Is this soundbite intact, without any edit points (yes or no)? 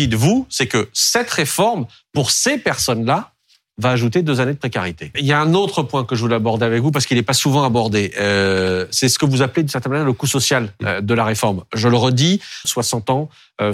no